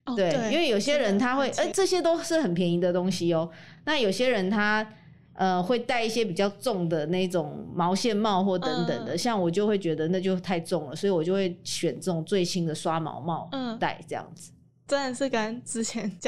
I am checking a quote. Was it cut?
no; 0 cuts

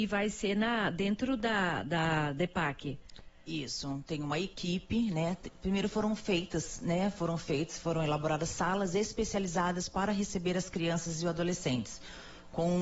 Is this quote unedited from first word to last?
yes; 0 cuts

